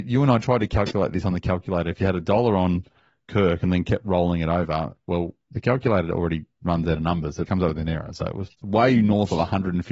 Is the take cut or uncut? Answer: cut